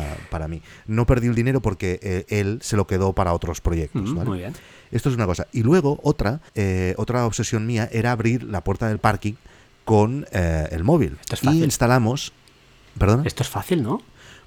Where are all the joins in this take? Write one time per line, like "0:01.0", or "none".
0:06.5
0:11.2